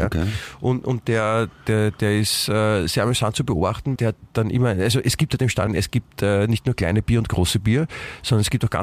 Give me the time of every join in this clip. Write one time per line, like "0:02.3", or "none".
0:04.0
0:05.7